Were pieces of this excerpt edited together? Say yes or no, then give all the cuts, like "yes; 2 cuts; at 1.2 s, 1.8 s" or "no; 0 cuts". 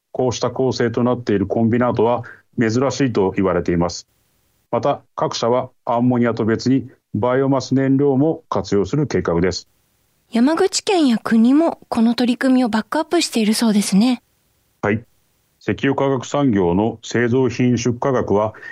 yes; 1 cut; at 10.2 s